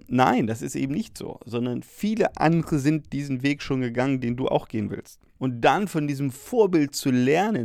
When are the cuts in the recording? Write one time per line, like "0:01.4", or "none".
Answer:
0:05.4